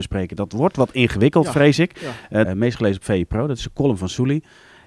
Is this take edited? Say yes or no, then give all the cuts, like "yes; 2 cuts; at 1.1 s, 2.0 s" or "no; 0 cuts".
yes; 1 cut; at 2.4 s